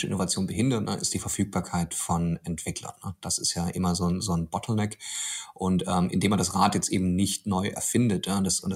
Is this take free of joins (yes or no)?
yes